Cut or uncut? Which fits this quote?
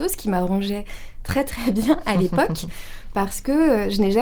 uncut